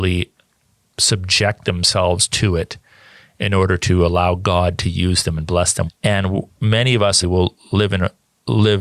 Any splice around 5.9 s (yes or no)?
yes